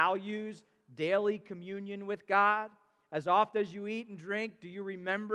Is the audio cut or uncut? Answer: uncut